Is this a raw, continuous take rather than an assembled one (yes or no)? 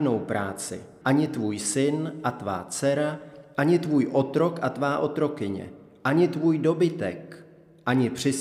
no